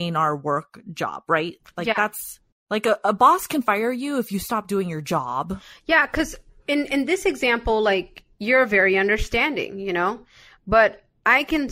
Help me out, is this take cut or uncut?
uncut